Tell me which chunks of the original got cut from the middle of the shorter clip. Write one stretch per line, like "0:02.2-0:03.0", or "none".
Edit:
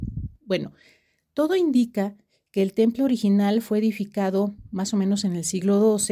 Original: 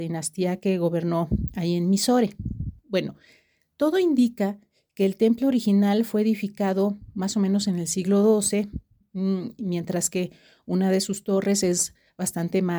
none